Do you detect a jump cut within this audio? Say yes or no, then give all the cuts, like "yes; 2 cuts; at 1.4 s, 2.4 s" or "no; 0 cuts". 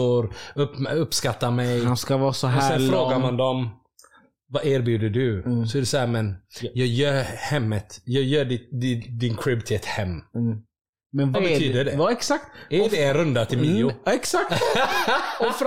yes; 1 cut; at 11.3 s